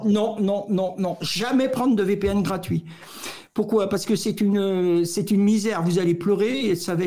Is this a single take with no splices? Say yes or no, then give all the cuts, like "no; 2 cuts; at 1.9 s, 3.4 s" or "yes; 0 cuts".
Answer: yes; 0 cuts